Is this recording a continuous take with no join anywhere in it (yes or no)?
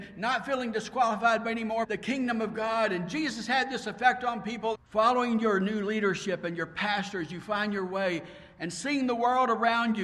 no